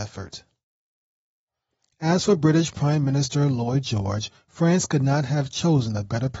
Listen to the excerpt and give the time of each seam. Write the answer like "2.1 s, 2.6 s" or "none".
none